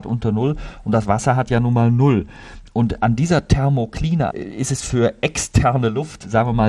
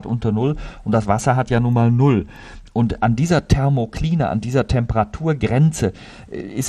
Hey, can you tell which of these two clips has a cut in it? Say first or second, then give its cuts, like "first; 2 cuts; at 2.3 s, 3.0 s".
first; 1 cut; at 4.3 s